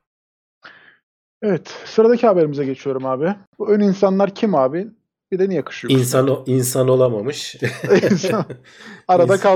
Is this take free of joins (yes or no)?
no